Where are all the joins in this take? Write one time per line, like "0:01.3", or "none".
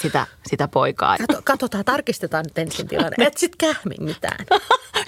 0:01.2